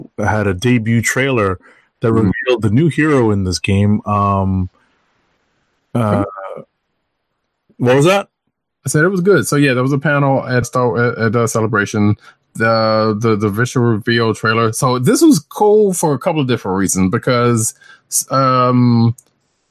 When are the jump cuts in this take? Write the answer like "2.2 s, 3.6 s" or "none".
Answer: 10.6 s